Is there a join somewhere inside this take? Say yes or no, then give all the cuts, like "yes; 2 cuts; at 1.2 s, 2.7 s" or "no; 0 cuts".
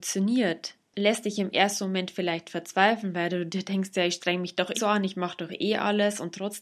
yes; 1 cut; at 4.7 s